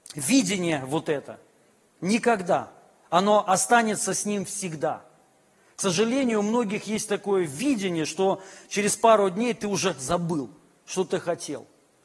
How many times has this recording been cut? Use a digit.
0